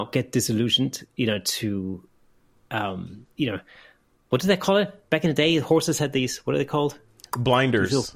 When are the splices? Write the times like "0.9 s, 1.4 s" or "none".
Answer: 3.4 s